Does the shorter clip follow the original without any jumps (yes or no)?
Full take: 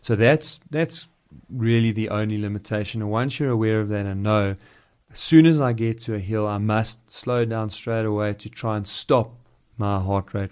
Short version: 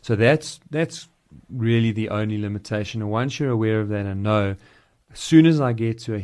yes